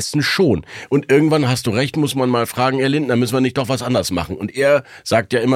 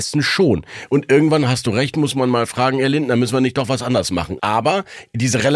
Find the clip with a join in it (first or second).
second